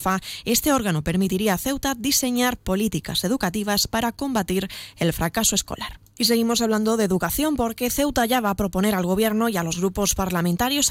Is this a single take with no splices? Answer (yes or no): no